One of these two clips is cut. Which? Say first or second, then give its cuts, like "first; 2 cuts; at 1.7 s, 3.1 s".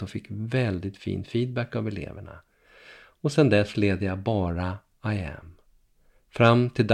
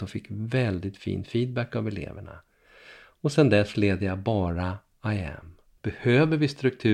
second; 1 cut; at 5.8 s